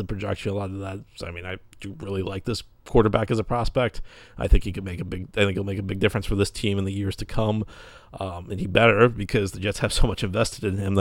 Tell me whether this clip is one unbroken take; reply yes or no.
yes